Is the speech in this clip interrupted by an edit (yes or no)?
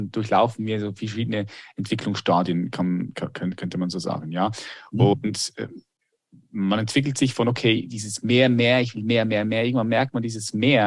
no